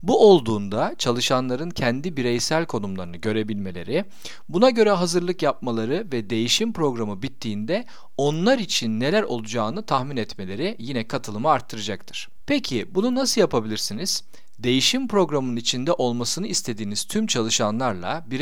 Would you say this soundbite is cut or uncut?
uncut